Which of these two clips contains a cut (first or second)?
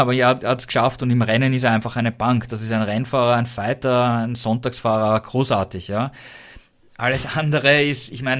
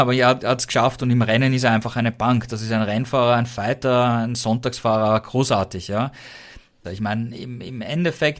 second